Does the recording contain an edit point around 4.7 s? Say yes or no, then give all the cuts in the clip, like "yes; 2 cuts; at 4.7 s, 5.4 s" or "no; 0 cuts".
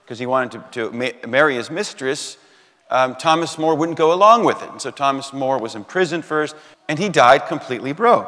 no; 1 cut; at 6.7 s